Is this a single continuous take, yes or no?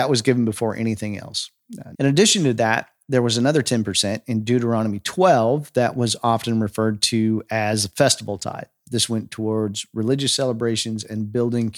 no